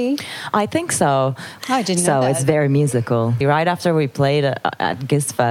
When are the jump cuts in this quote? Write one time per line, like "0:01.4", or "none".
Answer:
0:01.6
0:03.4